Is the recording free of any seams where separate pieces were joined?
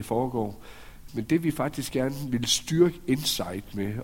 no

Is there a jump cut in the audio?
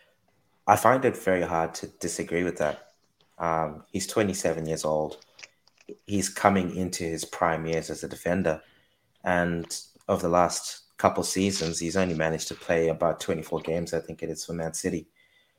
no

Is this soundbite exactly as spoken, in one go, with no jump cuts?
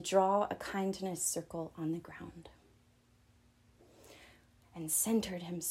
no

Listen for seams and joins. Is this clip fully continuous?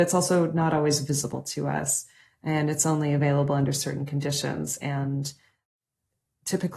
yes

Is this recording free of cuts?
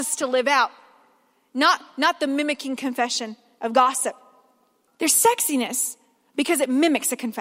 no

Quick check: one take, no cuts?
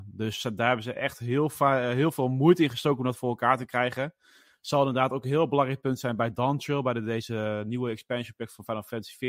yes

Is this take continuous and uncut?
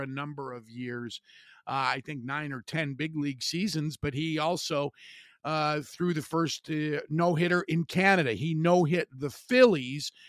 yes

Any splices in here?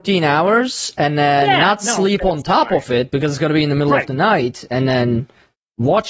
no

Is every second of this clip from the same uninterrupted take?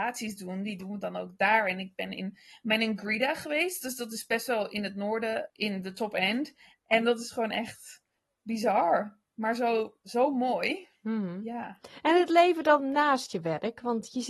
no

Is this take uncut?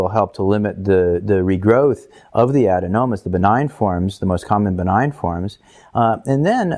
yes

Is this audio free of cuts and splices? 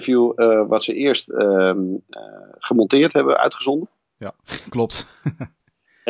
yes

